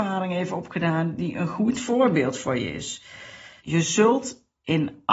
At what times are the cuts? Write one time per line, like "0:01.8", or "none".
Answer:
0:03.6